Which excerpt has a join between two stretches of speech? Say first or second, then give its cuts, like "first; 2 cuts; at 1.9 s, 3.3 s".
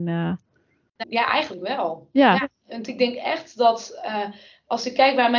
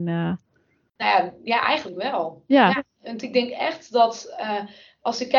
first; 1 cut; at 1.0 s